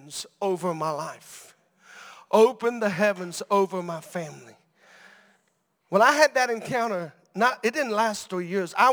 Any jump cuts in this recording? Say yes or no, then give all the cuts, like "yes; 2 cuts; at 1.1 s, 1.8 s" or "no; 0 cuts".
no; 0 cuts